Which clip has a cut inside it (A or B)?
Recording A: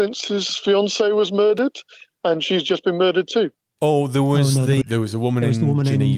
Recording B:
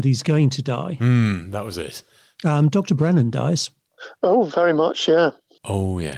A